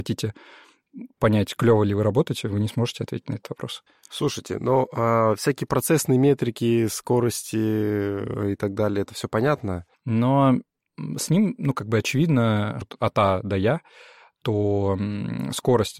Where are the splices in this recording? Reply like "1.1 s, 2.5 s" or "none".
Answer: 9.9 s, 12.8 s